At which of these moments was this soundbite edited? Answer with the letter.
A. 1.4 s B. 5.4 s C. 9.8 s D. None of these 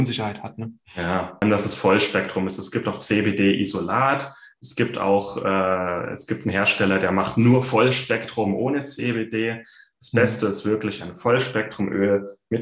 A